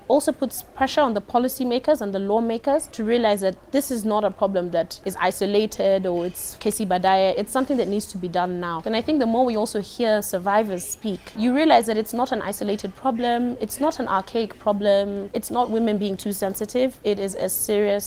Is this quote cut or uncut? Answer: uncut